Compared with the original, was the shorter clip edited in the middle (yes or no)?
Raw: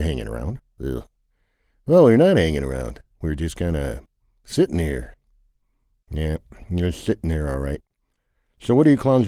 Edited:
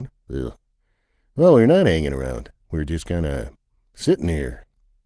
no